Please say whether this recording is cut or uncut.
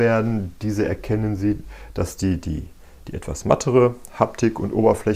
uncut